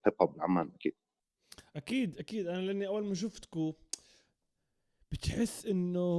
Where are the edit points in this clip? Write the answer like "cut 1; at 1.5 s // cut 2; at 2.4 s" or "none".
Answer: none